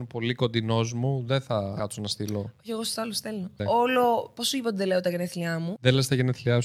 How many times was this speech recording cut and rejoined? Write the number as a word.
one